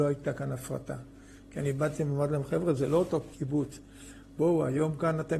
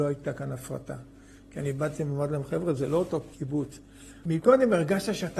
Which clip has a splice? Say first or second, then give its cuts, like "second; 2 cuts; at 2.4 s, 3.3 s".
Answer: second; 1 cut; at 4.2 s